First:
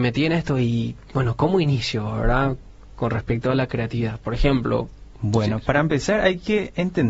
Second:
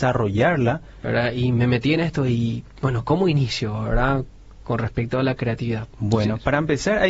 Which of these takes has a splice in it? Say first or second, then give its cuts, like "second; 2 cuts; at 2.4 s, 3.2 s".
second; 2 cuts; at 1.0 s, 5.9 s